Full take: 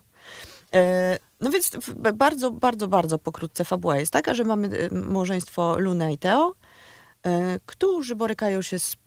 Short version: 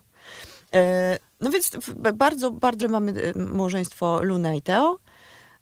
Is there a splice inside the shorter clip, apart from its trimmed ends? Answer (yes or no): yes